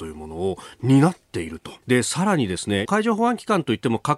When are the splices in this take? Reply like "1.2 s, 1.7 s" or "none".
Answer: 1.8 s, 2.9 s